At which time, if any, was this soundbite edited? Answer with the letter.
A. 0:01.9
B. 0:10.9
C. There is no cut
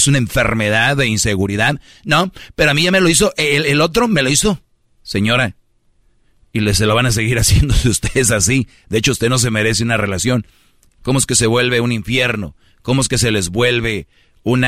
B